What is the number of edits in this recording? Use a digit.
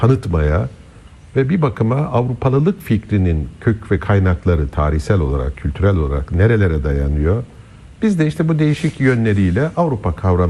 1